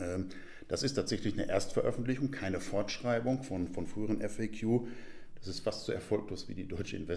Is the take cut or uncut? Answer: cut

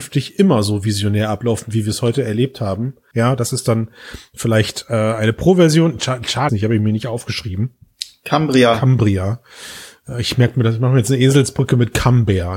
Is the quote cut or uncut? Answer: cut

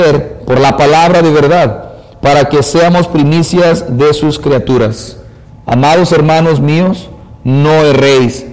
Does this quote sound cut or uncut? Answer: cut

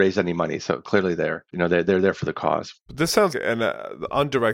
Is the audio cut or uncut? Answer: cut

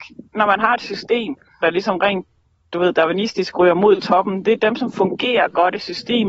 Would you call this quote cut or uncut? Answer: cut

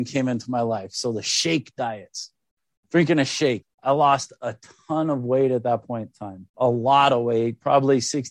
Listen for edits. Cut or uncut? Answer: cut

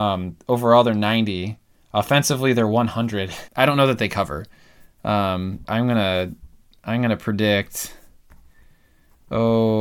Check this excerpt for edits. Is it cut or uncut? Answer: cut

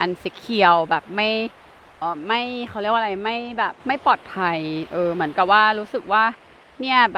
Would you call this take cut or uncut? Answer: cut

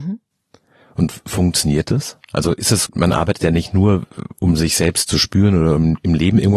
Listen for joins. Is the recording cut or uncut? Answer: cut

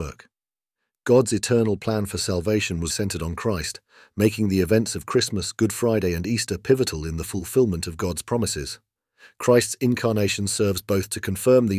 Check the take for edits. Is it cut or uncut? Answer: cut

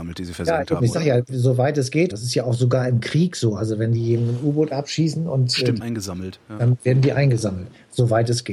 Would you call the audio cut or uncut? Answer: cut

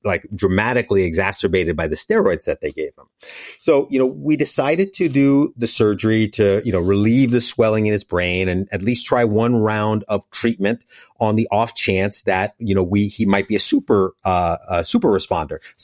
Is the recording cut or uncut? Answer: uncut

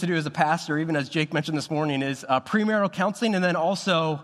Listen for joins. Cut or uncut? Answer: uncut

